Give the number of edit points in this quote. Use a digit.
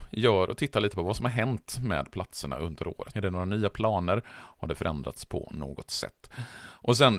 1